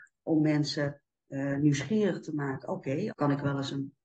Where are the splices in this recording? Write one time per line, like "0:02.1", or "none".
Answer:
0:03.1